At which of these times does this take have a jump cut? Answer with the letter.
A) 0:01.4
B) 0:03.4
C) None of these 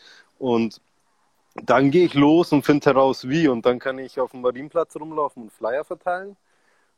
C